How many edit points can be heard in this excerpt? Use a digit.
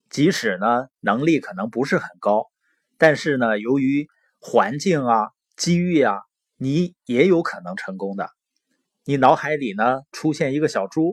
1